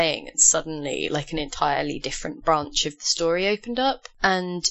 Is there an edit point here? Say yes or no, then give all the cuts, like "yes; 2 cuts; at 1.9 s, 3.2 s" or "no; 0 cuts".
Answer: no; 0 cuts